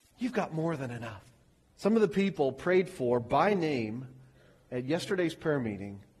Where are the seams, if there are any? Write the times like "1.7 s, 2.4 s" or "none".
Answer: 1.7 s